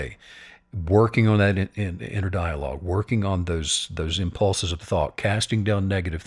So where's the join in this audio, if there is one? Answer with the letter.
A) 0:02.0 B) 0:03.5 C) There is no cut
C